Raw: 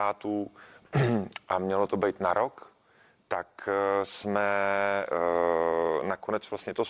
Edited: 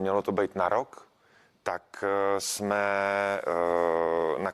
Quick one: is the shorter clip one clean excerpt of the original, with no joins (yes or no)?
yes